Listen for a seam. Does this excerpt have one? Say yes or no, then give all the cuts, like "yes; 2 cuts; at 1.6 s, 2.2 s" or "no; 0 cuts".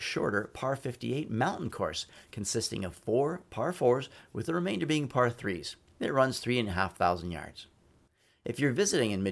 no; 0 cuts